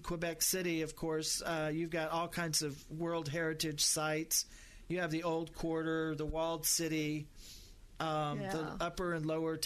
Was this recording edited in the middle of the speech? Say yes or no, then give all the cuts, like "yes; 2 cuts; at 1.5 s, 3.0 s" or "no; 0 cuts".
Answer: no; 0 cuts